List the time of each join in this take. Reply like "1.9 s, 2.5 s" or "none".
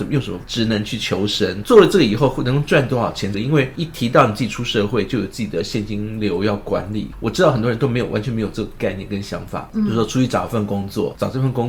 1.6 s, 3.3 s

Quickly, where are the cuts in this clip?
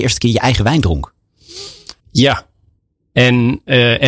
2.0 s

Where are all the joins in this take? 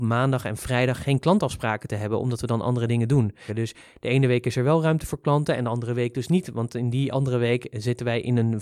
3.5 s

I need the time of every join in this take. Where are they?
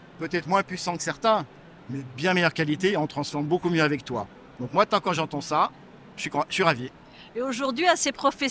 none

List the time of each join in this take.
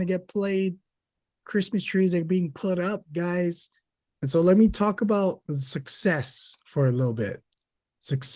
4.2 s, 5.5 s

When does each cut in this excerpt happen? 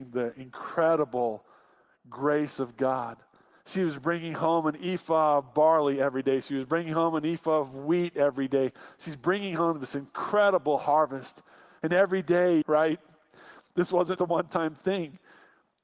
12.6 s, 14.2 s

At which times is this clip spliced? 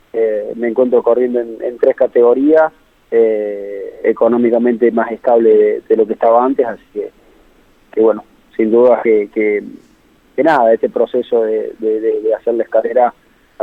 none

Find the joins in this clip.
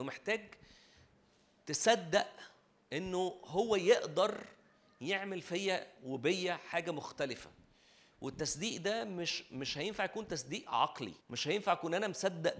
11.2 s

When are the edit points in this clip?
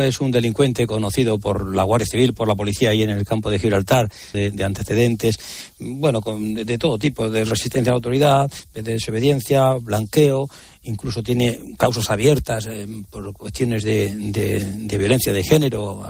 4.3 s

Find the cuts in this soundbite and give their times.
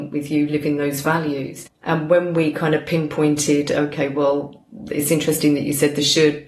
1.7 s

